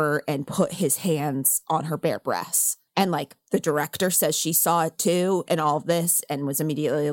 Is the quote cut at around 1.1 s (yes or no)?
no